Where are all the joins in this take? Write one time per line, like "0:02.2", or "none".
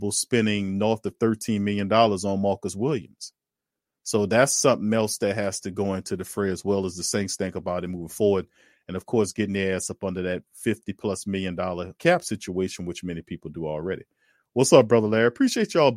0:12.0